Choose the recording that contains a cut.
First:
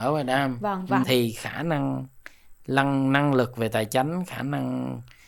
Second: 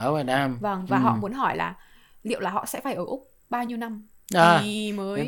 first; 1 cut; at 1.0 s

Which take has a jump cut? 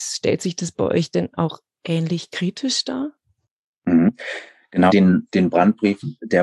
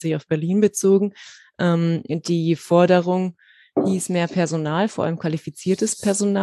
first; 1 cut; at 4.9 s

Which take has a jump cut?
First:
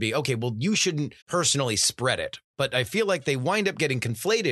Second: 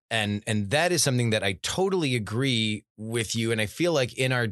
first; 1 cut; at 1.2 s

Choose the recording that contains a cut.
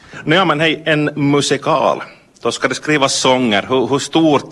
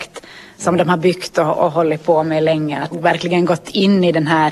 second; 1 cut; at 2.9 s

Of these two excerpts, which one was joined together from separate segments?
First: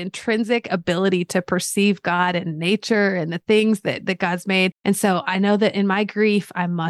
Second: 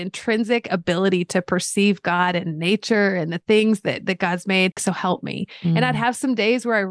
second; 1 cut; at 4.8 s

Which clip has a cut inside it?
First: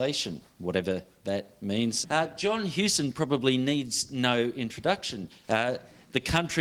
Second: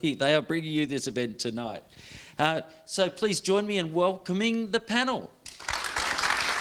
first; 2 cuts; at 2.0 s, 5.4 s

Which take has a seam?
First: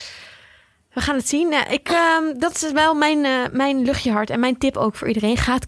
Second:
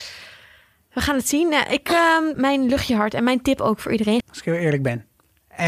second; 2 cuts; at 2.3 s, 4.2 s

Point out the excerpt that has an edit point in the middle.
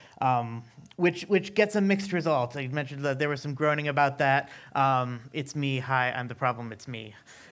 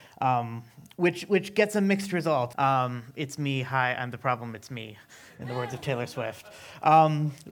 second; 1 cut; at 2.5 s

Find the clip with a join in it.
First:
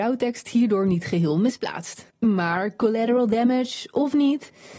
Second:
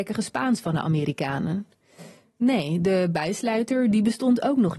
first; 1 cut; at 2.1 s

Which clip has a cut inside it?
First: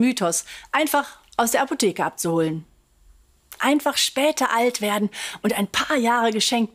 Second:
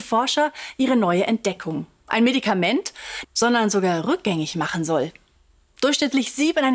second; 1 cut; at 3.2 s

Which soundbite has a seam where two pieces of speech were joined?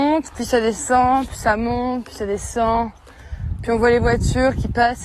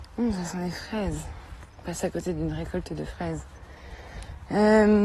second; 1 cut; at 1.7 s

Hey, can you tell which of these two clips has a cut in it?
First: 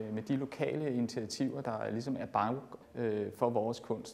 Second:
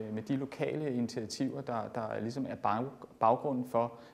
first; 2 cuts; at 1.6 s, 2.8 s

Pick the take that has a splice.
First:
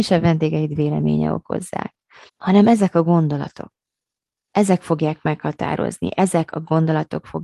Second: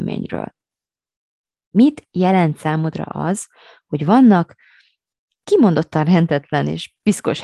first; 1 cut; at 2.3 s

